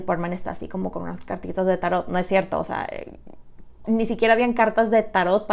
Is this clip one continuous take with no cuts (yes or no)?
no